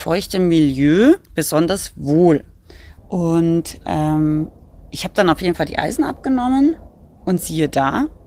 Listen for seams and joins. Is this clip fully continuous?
no; 2 cuts; at 1.2 s, 3.0 s

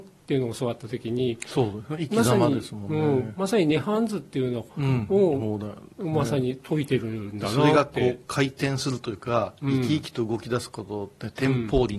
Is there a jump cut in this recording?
yes; 1 cut; at 4.7 s

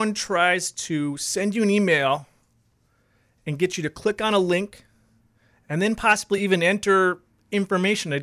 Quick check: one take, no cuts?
yes; 0 cuts

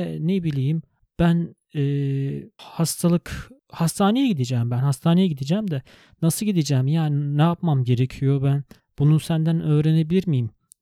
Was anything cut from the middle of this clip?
no; 0 cuts

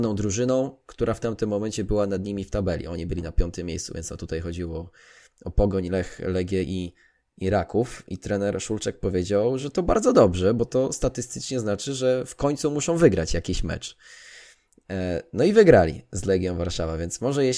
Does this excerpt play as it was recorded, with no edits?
yes; 0 cuts

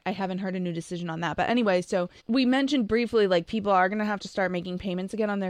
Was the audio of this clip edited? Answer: yes; 1 cut; at 2.2 s

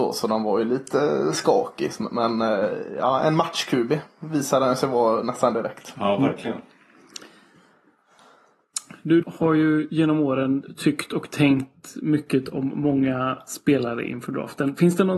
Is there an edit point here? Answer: yes; 1 cut; at 9.2 s

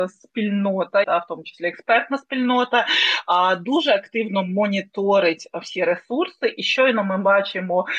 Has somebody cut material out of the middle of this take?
yes; 1 cut; at 1.0 s

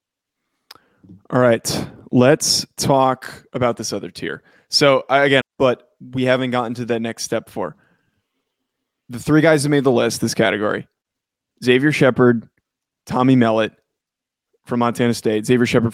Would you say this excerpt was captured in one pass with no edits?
no; 1 cut; at 5.4 s

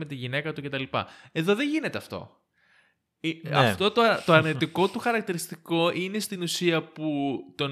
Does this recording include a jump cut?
no; 0 cuts

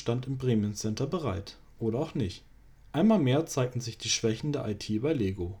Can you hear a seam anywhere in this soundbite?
no; 0 cuts

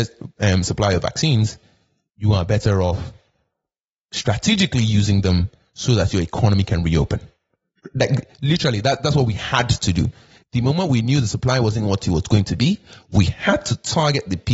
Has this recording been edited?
no; 0 cuts

